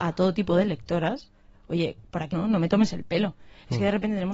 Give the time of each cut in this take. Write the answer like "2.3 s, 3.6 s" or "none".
2.3 s